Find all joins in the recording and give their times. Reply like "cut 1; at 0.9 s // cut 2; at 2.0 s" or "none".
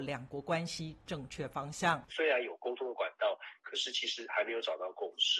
cut 1; at 2.1 s